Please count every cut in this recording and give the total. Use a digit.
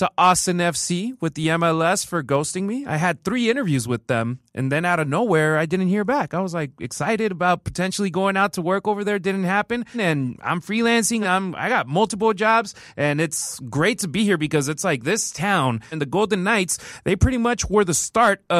3